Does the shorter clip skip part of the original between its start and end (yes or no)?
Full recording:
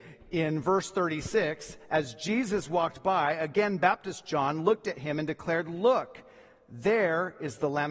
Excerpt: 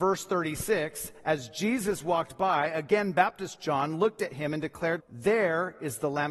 yes